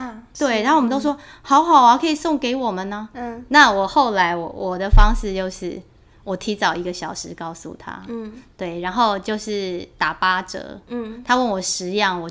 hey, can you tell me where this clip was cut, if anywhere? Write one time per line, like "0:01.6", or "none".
0:03.1